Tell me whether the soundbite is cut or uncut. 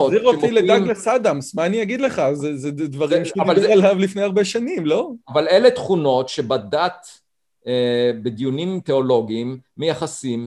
uncut